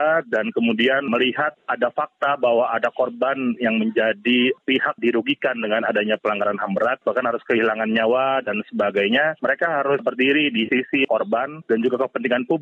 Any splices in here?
no; 0 cuts

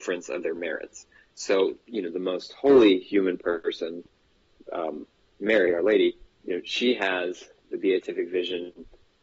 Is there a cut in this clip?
no; 0 cuts

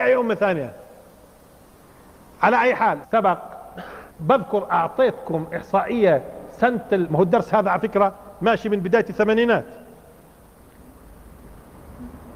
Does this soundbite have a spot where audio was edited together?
yes; 2 cuts; at 3.0 s, 4.1 s

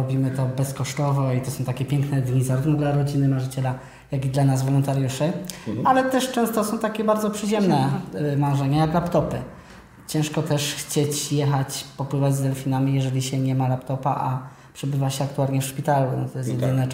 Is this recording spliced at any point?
no; 0 cuts

